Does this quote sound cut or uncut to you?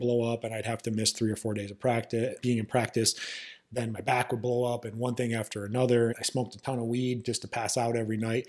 cut